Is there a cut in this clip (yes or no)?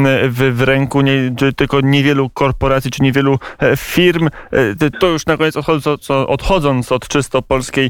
yes